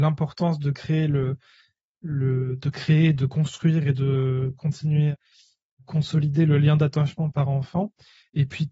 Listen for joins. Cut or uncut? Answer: uncut